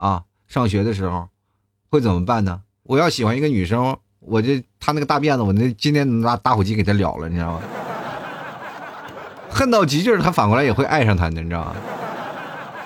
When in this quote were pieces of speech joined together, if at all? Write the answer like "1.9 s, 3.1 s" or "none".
2.9 s